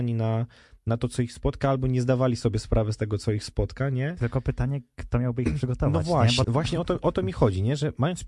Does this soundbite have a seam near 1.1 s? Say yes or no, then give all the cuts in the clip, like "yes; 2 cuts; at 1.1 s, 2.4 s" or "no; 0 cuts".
no; 1 cut; at 6.4 s